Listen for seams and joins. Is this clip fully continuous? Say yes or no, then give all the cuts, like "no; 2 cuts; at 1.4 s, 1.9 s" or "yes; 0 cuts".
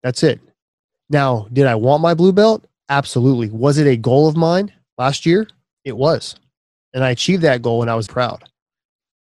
no; 1 cut; at 8.1 s